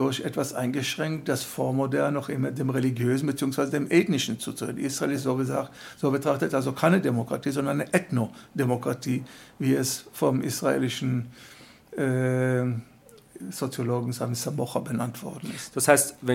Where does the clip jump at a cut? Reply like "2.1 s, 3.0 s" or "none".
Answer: none